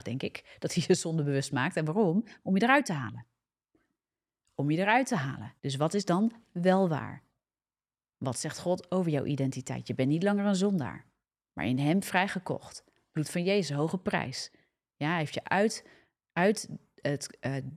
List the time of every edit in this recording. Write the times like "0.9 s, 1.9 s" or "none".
5.6 s